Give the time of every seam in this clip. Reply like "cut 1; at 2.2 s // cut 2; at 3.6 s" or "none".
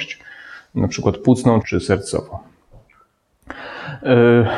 cut 1; at 1.6 s